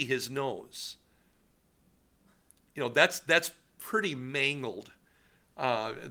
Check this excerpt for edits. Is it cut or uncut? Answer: uncut